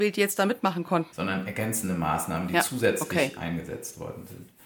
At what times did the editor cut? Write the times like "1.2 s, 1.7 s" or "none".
1.1 s